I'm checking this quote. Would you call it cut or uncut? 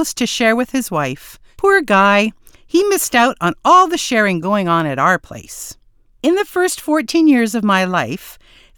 uncut